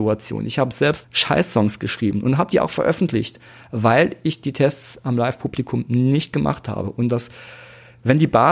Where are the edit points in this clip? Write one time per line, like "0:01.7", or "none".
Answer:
0:01.0